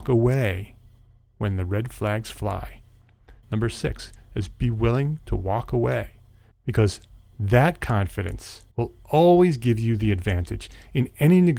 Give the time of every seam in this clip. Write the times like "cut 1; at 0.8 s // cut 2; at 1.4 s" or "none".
cut 1; at 3.4 s // cut 2; at 6.5 s // cut 3; at 8.7 s